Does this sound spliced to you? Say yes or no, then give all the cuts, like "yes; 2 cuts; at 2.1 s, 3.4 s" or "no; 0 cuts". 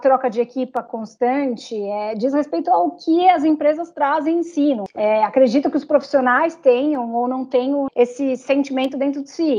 yes; 2 cuts; at 4.9 s, 7.9 s